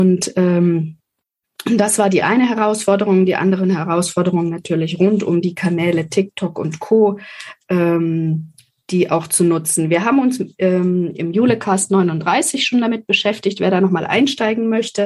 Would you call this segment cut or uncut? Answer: uncut